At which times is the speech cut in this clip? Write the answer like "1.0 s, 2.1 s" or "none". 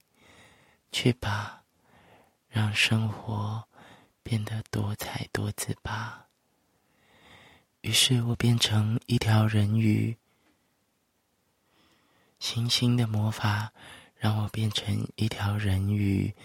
none